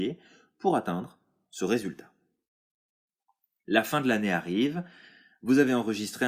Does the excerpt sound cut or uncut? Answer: uncut